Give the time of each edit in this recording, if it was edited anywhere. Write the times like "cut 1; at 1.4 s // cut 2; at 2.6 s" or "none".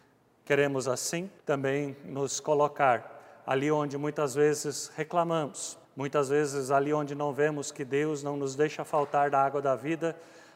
cut 1; at 1.4 s // cut 2; at 5.8 s